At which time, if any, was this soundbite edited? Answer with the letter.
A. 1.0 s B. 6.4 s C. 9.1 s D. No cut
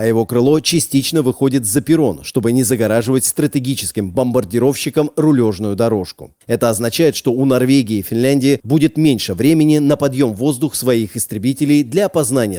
B